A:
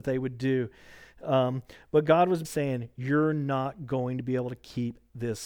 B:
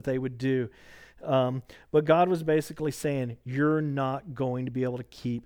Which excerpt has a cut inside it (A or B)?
A